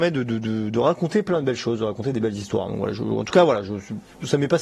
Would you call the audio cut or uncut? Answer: uncut